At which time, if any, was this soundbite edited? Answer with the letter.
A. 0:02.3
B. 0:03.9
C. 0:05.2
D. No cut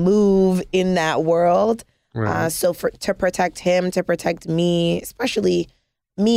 D